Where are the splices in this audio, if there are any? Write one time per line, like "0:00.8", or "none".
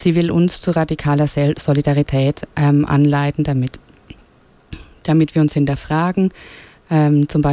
none